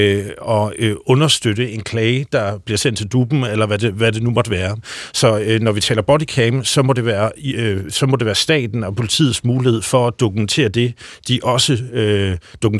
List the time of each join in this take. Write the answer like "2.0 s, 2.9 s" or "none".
none